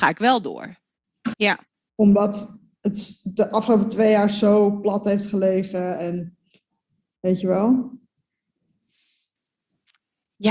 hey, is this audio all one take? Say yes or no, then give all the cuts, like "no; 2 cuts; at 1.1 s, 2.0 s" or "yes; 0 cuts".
no; 1 cut; at 1.3 s